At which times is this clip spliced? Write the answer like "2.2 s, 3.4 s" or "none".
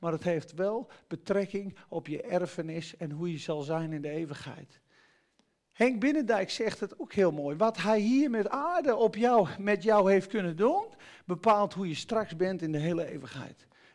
none